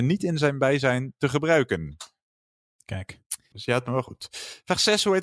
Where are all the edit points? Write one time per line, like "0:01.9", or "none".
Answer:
0:03.5

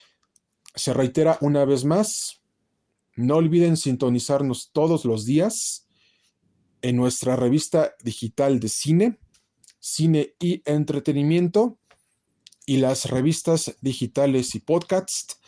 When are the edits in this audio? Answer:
none

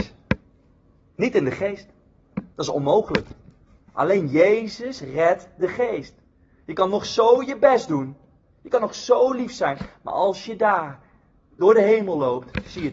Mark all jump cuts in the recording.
none

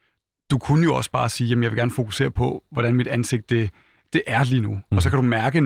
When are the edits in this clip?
none

